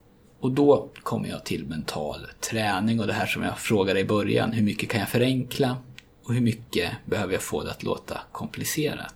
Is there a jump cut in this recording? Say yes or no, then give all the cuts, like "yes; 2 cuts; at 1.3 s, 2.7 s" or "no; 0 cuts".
no; 0 cuts